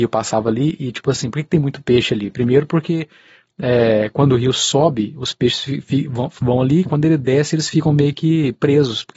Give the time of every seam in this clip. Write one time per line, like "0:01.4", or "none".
none